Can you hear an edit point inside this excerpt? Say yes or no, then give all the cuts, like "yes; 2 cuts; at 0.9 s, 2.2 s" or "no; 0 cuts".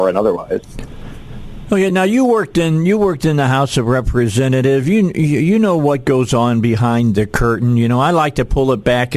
no; 0 cuts